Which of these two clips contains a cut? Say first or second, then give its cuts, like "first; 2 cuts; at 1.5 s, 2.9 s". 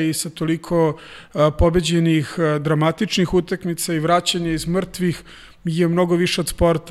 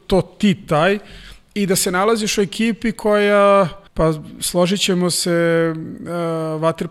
second; 1 cut; at 3.9 s